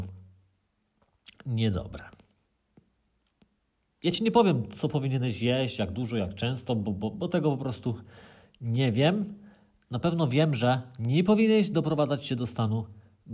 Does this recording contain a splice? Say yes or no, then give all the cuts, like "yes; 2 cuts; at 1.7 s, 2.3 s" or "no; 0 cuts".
no; 0 cuts